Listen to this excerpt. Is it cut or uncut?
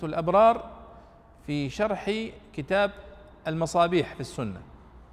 uncut